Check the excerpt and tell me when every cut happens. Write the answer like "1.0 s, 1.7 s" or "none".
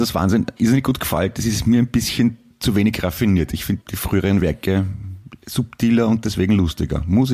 3.8 s, 5.4 s